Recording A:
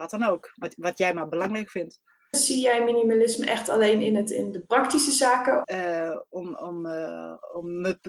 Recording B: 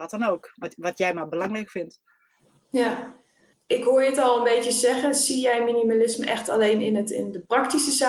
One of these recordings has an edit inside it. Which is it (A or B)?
A